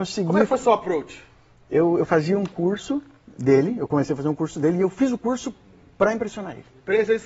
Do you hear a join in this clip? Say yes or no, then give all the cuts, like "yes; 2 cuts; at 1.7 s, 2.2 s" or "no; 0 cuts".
no; 0 cuts